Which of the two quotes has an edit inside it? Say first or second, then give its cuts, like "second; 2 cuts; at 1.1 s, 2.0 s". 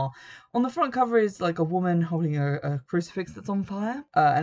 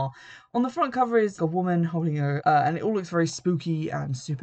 second; 2 cuts; at 1.4 s, 2.4 s